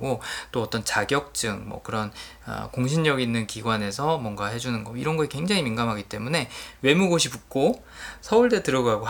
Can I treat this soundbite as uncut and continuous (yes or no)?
yes